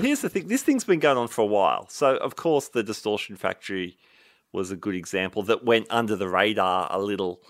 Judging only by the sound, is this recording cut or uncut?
uncut